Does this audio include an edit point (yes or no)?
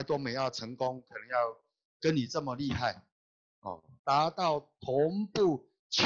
yes